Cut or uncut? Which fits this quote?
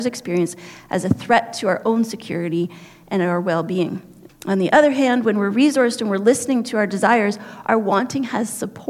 cut